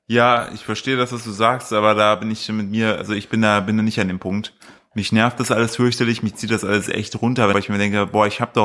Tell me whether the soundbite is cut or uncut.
cut